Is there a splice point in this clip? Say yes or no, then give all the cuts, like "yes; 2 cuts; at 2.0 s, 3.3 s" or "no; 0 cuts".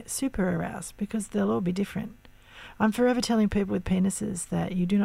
no; 0 cuts